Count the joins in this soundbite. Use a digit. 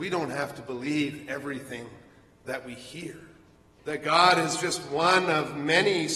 1